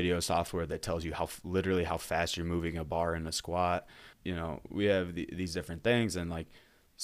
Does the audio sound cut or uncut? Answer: cut